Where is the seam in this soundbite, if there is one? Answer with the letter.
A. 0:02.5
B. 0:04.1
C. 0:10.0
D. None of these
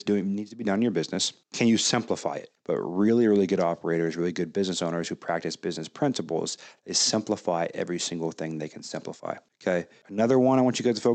A